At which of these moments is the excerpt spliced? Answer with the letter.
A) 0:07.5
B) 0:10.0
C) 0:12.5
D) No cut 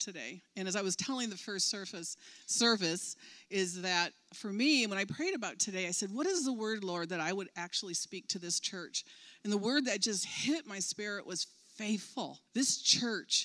C